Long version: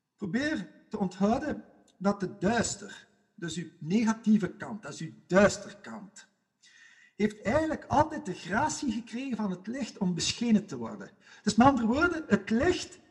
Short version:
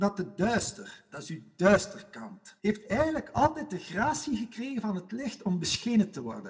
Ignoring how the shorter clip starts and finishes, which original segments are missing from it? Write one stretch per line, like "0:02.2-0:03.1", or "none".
0:03.1-0:04.8
0:06.3-0:07.1